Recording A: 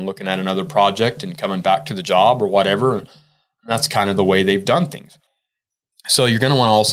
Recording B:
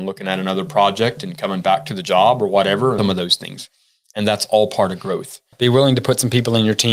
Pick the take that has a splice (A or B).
B